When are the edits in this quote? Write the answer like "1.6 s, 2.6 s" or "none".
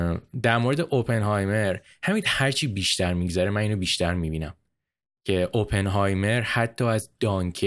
none